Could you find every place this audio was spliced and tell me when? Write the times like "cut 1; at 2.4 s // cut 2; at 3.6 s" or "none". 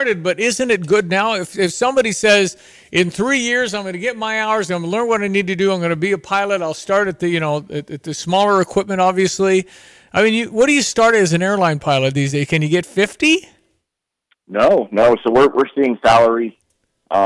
none